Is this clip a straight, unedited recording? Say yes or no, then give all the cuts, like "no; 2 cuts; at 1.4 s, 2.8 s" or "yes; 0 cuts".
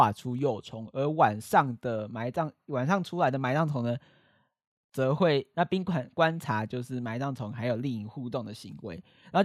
no; 1 cut; at 5.5 s